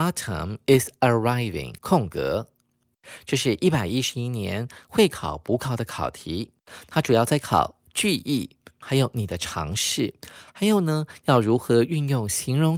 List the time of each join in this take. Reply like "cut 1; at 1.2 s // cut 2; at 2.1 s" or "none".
cut 1; at 1.8 s